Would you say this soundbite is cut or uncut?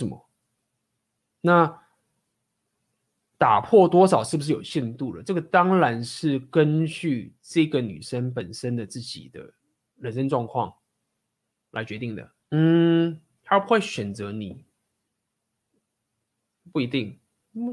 cut